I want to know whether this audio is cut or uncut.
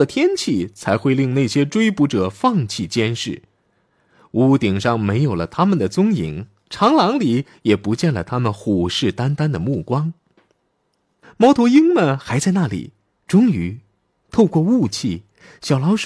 cut